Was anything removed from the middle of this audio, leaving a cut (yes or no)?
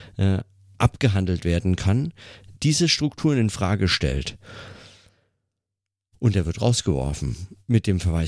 no